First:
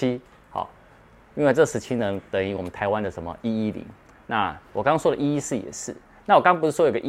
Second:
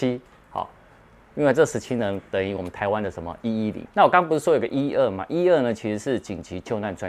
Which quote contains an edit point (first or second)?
second